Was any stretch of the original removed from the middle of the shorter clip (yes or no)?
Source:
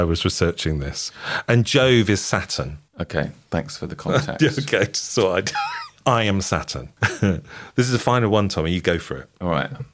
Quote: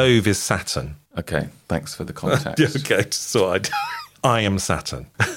no